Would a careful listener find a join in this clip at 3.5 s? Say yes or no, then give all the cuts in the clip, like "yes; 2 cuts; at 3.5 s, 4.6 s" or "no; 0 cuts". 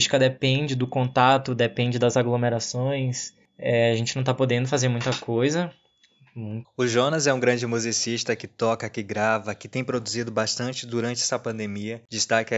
no; 1 cut; at 6.6 s